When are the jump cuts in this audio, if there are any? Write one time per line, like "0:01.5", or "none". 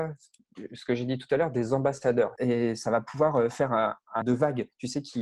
0:02.4
0:04.2